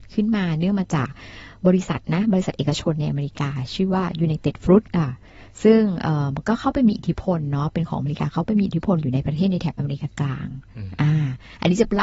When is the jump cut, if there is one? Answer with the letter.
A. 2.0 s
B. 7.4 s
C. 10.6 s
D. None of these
A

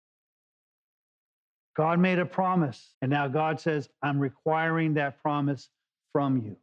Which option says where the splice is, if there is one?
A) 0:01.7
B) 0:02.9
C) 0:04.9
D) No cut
B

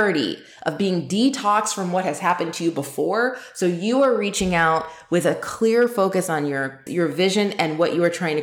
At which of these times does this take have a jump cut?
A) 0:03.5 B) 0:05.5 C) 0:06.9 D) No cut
C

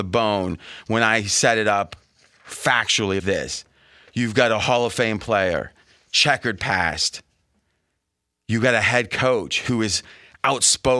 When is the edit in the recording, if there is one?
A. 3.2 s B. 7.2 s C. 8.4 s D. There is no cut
A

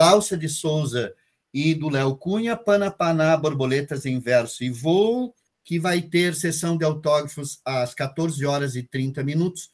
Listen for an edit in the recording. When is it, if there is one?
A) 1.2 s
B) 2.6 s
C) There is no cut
C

